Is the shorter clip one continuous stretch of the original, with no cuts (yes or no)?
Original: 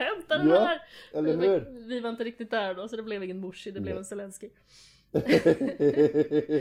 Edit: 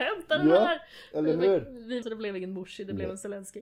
no